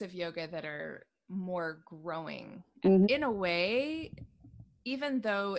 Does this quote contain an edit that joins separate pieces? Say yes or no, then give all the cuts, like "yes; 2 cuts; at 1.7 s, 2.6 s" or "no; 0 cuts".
yes; 1 cut; at 3.0 s